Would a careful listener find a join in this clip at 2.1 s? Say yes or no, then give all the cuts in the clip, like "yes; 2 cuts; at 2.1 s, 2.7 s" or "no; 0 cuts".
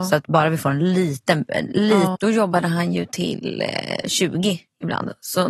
yes; 1 cut; at 2.1 s